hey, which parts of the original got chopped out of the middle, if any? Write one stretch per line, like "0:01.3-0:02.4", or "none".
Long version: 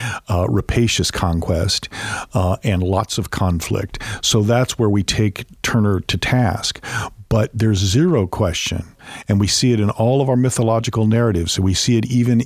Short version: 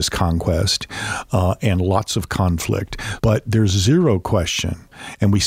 0:04.2-0:07.3